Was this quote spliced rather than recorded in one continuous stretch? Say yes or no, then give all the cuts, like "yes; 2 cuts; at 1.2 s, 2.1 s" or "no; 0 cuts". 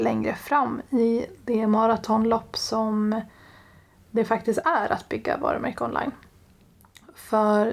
no; 0 cuts